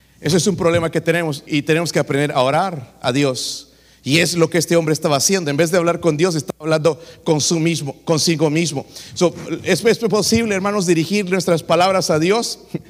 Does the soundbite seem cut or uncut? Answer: cut